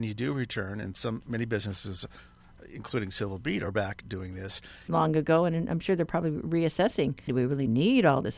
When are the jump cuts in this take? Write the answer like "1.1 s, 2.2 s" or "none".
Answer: 4.9 s, 7.3 s